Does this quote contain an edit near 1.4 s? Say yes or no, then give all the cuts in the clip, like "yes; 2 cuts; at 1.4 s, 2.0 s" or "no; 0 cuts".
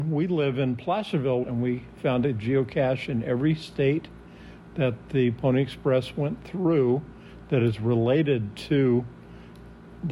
yes; 1 cut; at 1.4 s